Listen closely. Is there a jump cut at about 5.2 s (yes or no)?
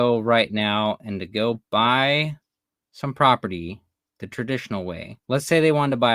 yes